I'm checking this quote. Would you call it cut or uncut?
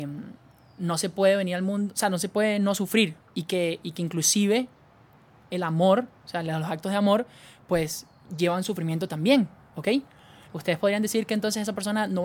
cut